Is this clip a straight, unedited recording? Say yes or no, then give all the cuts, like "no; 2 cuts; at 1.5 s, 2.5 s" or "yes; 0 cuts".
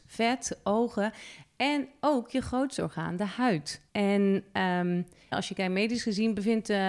no; 2 cuts; at 3.9 s, 5.3 s